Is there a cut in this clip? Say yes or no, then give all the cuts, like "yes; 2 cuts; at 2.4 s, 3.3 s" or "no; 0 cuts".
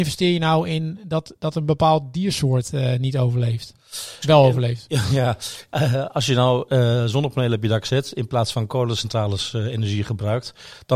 yes; 1 cut; at 4.2 s